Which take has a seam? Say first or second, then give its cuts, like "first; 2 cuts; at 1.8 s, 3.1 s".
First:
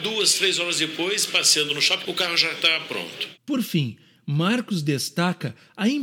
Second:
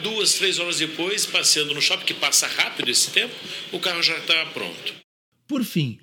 first; 2 cuts; at 2.0 s, 3.4 s